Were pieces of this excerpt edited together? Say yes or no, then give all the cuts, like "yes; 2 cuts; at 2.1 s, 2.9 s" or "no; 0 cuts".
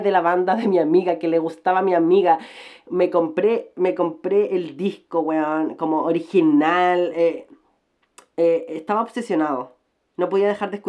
no; 0 cuts